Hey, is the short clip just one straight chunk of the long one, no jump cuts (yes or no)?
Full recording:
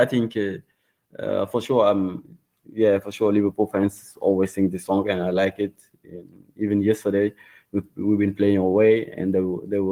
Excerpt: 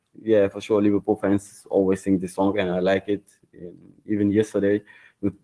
yes